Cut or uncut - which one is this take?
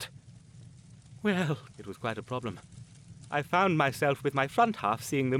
cut